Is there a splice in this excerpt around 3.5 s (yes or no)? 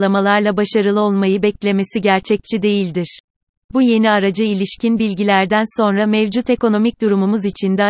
yes